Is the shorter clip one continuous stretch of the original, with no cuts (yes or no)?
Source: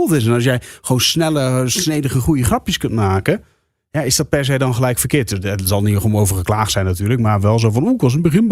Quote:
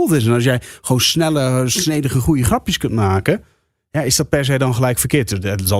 yes